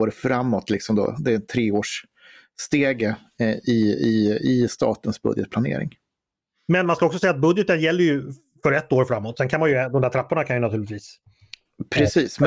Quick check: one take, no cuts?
yes; 0 cuts

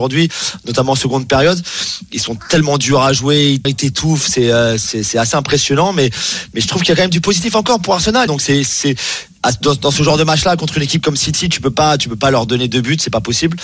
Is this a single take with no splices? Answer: no; 2 cuts; at 3.6 s, 8.3 s

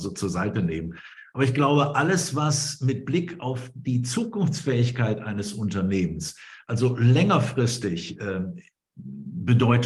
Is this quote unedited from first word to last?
yes; 0 cuts

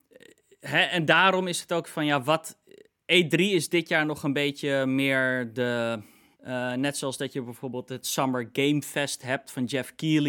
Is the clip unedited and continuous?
no; 1 cut; at 6.3 s

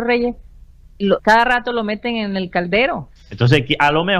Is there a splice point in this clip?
yes; 2 cuts; at 1.2 s, 3.2 s

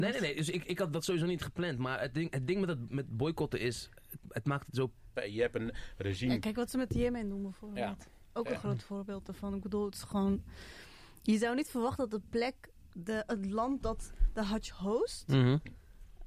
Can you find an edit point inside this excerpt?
yes; 1 cut; at 5.2 s

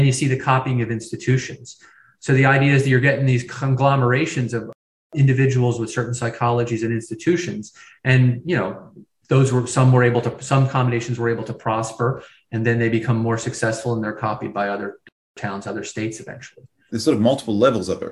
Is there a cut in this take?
yes; 2 cuts; at 15.6 s, 16.9 s

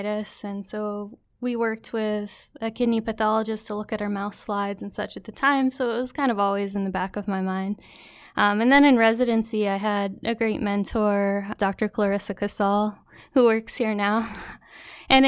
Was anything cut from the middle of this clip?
yes; 1 cut; at 11.6 s

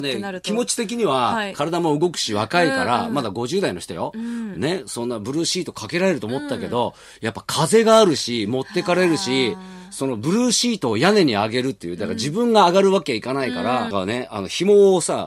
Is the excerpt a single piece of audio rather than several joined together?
no; 1 cut; at 13.9 s

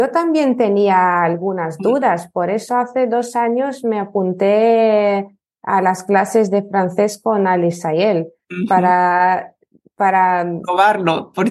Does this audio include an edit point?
no; 0 cuts

